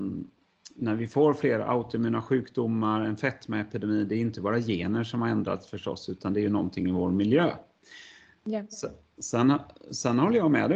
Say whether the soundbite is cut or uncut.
uncut